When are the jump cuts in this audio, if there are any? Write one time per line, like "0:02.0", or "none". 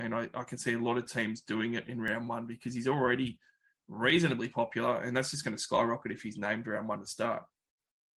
none